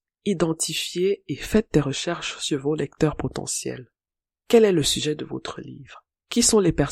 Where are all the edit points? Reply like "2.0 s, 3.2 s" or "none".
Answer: none